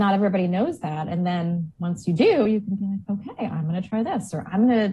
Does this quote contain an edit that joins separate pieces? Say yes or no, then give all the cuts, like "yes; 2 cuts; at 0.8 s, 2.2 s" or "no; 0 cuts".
no; 0 cuts